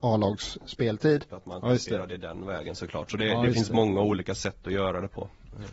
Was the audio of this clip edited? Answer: yes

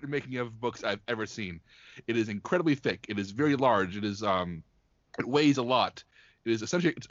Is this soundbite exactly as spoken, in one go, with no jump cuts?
yes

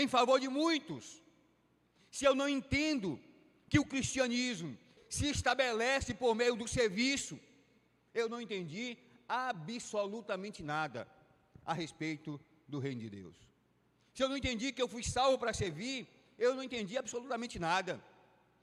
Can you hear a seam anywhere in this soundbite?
yes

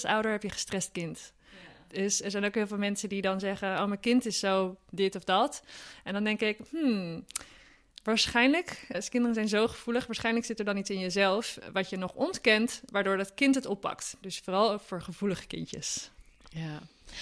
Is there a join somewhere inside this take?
yes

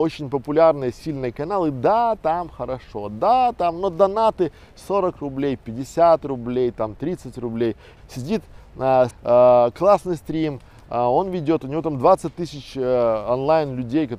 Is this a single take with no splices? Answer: no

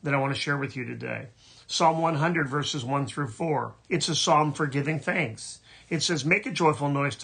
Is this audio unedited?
no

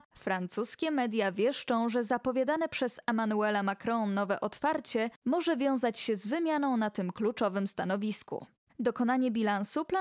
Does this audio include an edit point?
yes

